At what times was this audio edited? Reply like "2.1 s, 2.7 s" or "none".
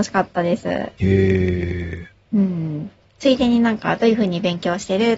2.3 s